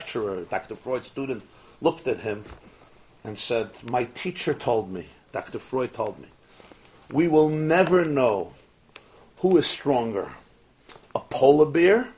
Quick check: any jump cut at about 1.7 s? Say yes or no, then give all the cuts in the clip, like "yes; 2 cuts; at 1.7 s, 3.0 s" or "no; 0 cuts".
no; 0 cuts